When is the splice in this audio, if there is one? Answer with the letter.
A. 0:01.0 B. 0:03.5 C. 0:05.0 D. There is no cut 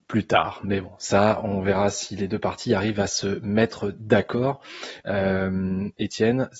C